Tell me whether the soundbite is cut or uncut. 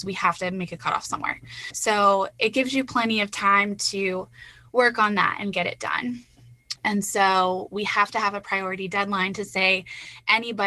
cut